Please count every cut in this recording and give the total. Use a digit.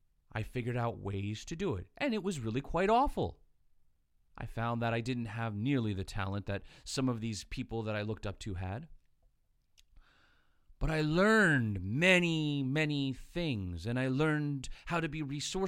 0